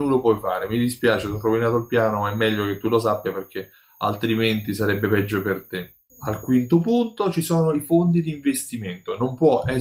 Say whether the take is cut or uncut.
uncut